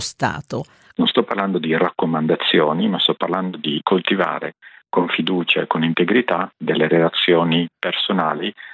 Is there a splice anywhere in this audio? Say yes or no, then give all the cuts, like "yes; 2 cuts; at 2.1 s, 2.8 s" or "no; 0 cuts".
yes; 2 cuts; at 0.9 s, 3.8 s